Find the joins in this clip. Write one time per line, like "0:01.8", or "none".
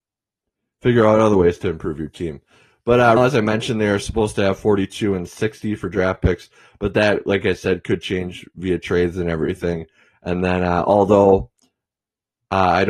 0:03.2